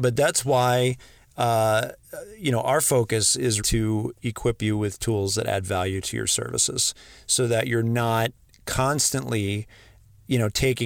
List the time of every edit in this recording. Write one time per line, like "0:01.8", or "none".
0:03.6